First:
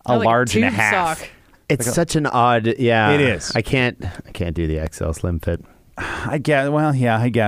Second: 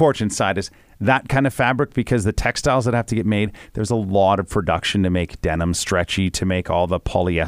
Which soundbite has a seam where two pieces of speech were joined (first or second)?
first